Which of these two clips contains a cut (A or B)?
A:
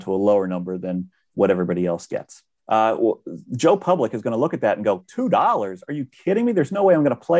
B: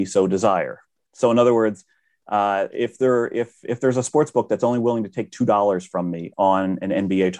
A